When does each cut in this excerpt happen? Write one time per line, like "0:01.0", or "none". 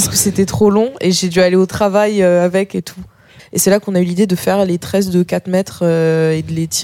0:03.4